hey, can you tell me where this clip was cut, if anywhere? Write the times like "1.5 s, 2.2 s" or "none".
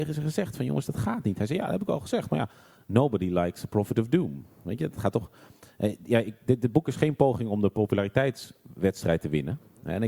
none